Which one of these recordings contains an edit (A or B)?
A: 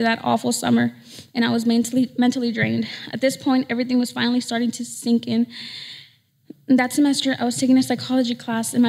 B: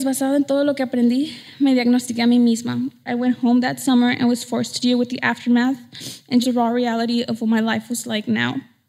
B